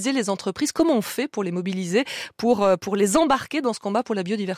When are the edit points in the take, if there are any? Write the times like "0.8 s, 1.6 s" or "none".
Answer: none